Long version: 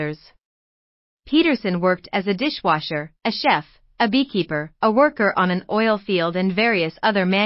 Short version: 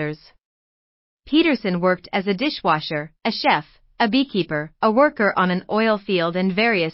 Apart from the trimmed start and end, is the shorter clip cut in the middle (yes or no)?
no